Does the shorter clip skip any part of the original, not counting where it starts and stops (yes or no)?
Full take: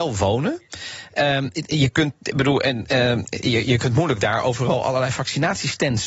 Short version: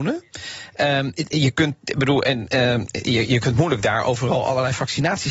no